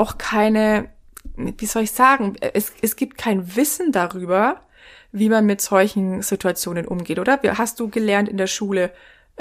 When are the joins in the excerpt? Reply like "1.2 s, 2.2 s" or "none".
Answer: none

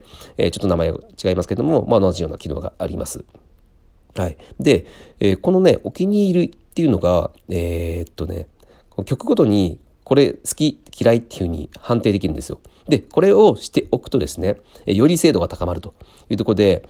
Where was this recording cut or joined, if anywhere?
none

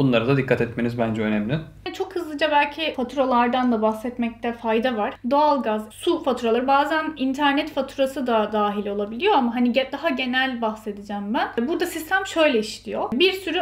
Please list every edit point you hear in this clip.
5.9 s

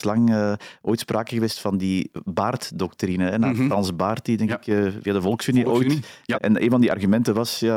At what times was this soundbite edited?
6.4 s

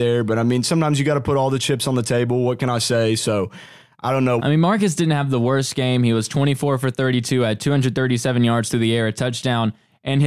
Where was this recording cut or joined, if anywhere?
4.4 s

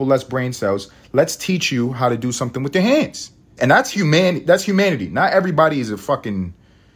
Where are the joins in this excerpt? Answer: 3.6 s

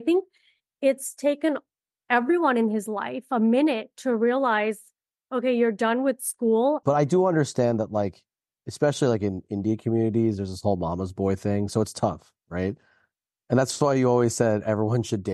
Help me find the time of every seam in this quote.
6.8 s

